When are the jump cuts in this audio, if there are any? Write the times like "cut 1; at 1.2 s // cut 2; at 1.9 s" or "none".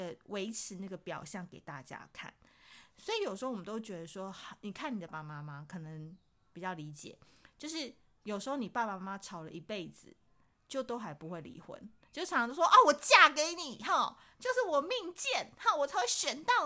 cut 1; at 5.1 s